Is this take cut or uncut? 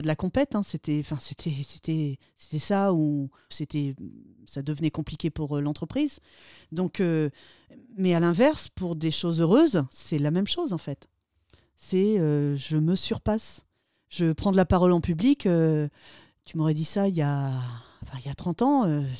cut